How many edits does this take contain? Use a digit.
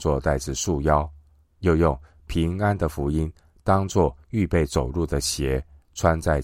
1